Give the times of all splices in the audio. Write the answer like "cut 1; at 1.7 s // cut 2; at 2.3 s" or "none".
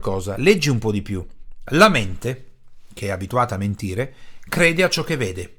cut 1; at 1.7 s